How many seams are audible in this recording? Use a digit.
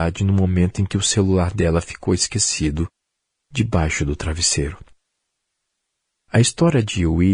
0